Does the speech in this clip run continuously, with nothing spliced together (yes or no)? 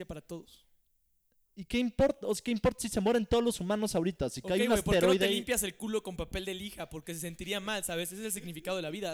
yes